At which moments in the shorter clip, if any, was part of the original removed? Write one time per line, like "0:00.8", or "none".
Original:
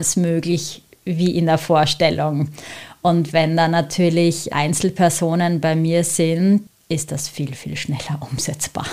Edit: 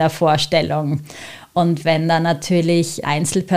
none